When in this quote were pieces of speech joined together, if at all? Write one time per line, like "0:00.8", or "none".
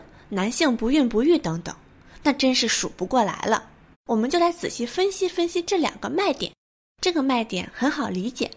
0:03.9
0:06.9